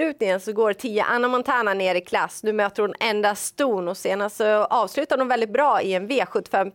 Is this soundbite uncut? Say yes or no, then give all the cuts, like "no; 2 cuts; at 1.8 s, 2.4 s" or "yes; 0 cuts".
yes; 0 cuts